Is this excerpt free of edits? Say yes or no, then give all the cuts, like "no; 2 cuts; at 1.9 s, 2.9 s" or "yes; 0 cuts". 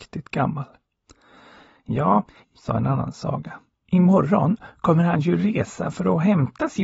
no; 1 cut; at 2.4 s